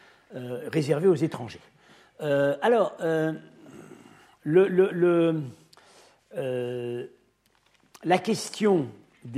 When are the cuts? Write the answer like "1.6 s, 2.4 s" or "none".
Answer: none